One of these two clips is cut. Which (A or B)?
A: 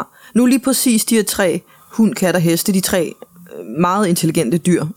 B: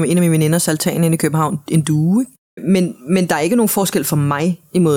B